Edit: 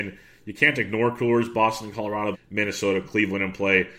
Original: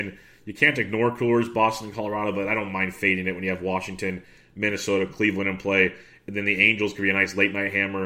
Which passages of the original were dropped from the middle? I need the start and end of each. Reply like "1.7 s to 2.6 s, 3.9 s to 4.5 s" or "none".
2.3 s to 4.4 s

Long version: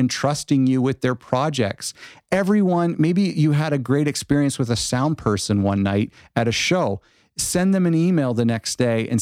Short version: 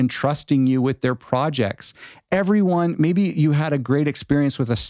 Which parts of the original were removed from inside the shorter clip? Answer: none

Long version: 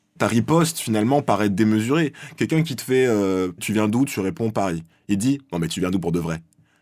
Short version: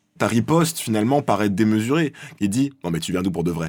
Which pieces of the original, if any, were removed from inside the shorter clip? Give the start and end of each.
2.4 s to 5.0 s

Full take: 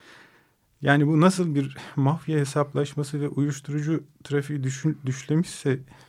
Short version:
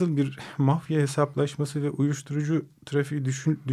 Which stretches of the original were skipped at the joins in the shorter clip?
none

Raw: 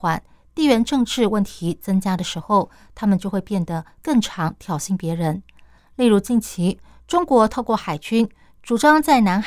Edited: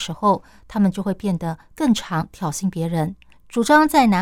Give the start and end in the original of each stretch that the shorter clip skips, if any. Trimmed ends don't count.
5.6 s to 8.5 s

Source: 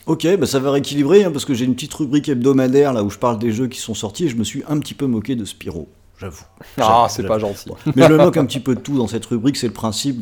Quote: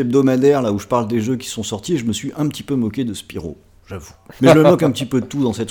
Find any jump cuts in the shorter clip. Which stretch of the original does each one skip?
6.7 s to 7.9 s

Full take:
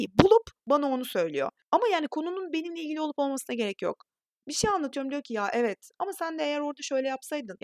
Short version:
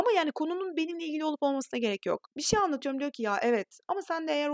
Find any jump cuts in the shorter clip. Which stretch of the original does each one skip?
4.0 s to 4.4 s

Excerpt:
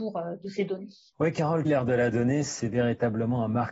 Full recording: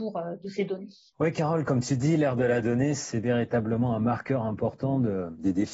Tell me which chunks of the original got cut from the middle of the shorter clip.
1.7 s to 2.2 s

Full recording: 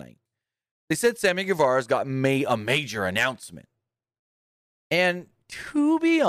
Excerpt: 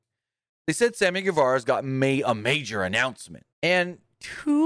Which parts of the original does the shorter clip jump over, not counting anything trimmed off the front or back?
3.7 s to 4.8 s

